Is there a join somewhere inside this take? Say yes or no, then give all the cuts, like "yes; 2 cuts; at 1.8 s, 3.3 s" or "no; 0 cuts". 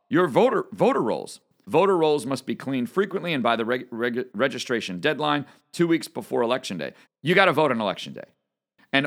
yes; 2 cuts; at 1.6 s, 7.0 s